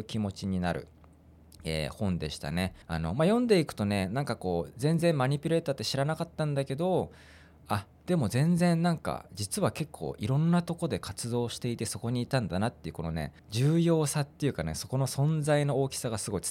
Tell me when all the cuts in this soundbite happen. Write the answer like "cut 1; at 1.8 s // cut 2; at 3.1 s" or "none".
cut 1; at 2.8 s // cut 2; at 13.4 s